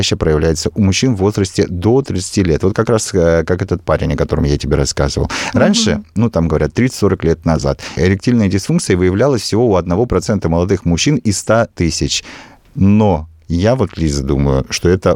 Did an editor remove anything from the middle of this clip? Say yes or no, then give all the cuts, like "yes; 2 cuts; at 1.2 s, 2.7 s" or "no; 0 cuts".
yes; 1 cut; at 8.0 s